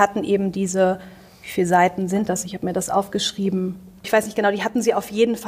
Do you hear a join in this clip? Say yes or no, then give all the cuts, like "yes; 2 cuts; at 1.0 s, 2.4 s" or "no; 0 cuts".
yes; 1 cut; at 4.0 s